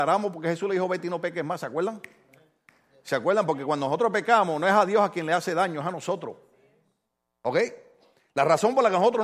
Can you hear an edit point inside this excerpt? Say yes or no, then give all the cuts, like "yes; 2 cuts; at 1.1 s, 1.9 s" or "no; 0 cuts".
no; 0 cuts